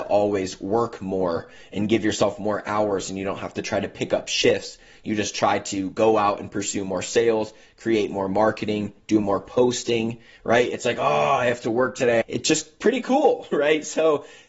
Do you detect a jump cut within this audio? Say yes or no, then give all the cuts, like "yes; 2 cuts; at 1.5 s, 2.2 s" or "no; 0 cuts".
yes; 1 cut; at 12.2 s